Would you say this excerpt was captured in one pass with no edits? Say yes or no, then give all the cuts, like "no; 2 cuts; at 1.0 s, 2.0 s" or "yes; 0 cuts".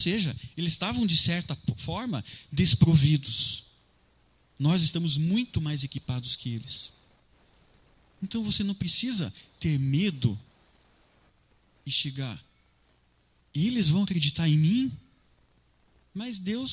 yes; 0 cuts